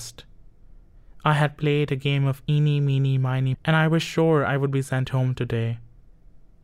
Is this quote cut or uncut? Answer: cut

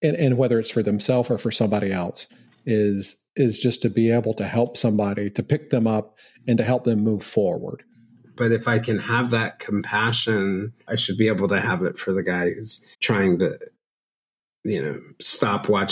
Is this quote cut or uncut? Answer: cut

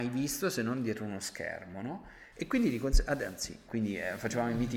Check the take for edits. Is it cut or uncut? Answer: cut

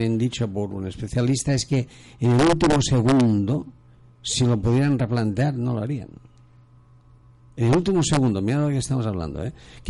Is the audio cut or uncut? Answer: uncut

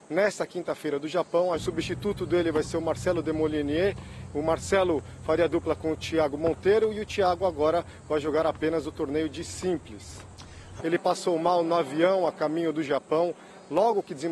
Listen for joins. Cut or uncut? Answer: cut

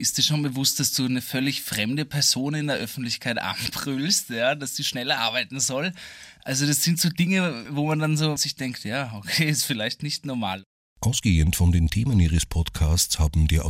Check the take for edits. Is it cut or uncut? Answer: uncut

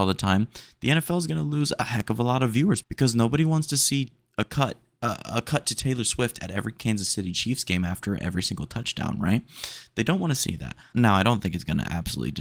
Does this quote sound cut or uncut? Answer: cut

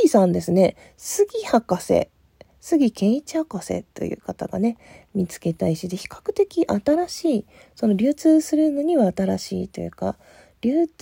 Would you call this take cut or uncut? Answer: uncut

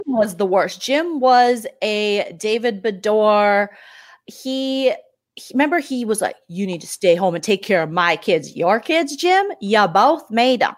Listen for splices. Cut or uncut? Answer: uncut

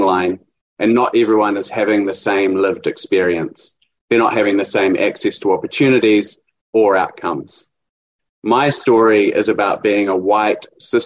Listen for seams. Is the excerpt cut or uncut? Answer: uncut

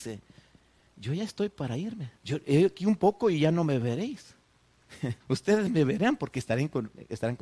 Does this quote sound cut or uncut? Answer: cut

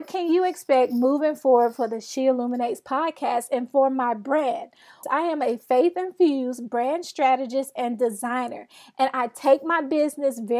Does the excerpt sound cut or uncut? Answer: cut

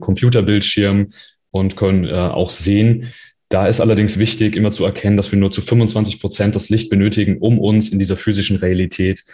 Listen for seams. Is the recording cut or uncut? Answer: uncut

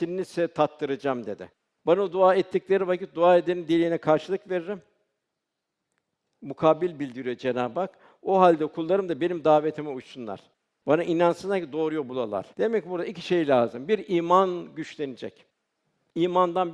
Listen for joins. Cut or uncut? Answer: cut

